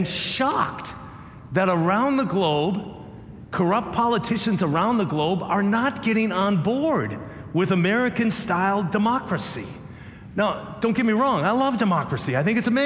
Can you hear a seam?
yes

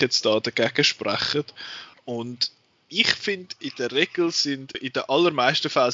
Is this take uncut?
no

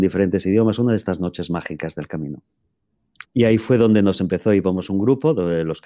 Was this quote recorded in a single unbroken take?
no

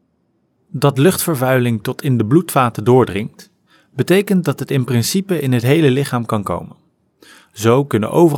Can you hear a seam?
no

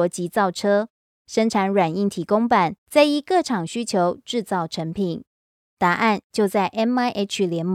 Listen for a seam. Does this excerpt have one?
yes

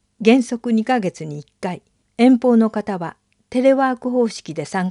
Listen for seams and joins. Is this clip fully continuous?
no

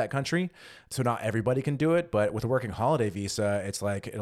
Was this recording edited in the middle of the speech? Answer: no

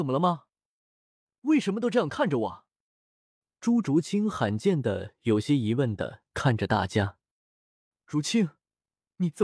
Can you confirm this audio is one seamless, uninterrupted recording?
yes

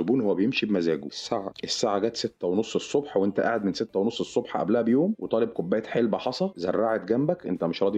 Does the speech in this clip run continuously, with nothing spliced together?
yes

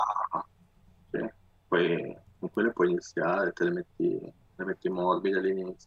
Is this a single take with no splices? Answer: yes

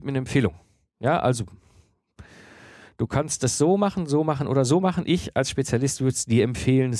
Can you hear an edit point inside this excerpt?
no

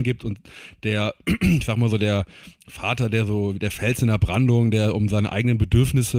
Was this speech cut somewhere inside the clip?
no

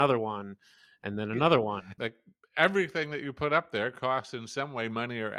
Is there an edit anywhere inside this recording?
yes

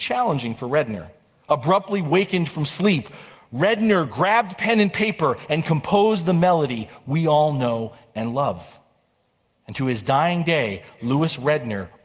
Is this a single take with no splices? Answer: no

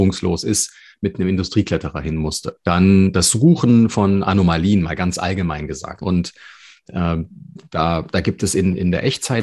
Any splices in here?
yes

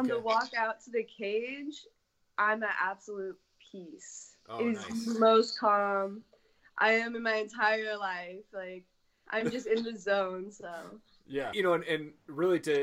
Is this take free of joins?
no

